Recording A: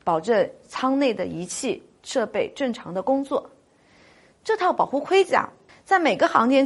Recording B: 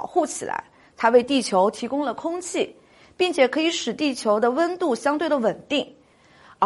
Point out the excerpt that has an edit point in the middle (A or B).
A